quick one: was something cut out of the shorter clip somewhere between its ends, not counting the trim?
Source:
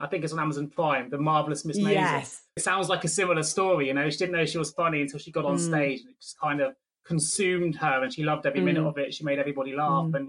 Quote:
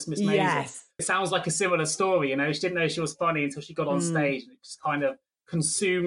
no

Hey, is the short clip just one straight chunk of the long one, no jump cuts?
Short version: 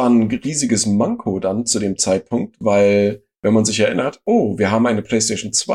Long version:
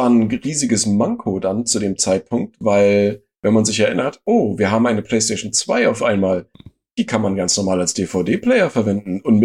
yes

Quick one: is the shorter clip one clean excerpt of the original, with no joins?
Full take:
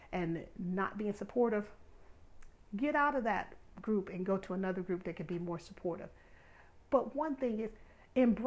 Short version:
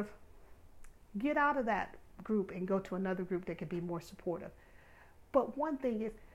yes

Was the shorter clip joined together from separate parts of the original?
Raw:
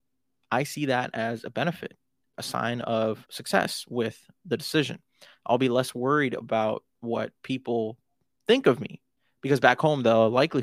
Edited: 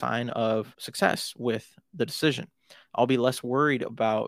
no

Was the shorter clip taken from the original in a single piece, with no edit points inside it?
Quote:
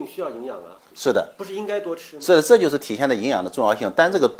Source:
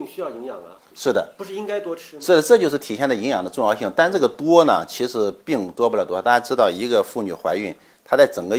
yes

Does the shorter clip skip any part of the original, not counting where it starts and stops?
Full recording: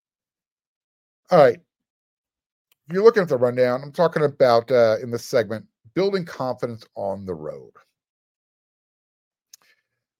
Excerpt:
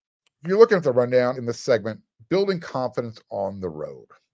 yes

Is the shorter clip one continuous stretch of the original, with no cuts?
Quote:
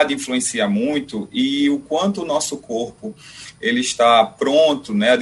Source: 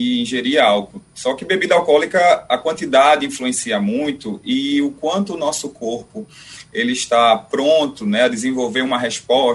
yes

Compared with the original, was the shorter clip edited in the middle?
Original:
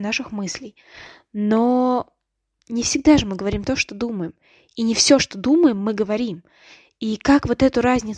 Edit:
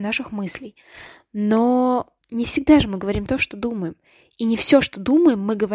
yes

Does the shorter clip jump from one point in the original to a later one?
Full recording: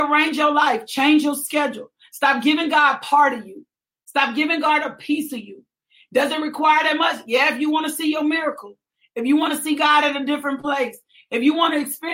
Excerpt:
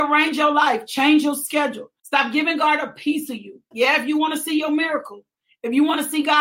yes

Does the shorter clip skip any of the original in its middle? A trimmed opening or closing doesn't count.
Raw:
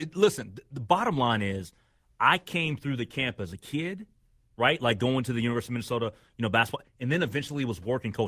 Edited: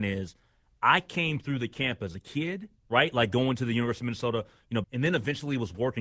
yes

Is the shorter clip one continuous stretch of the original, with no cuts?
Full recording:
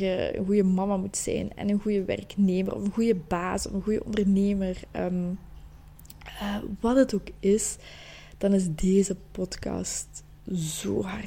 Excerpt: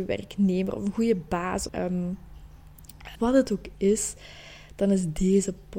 no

